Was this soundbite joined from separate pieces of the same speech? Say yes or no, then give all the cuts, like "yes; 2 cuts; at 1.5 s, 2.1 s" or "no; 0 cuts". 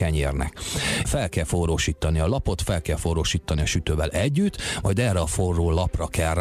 yes; 1 cut; at 1.0 s